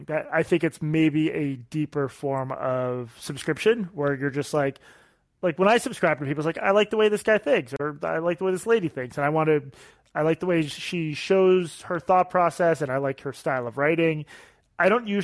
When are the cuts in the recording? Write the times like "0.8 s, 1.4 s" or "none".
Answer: none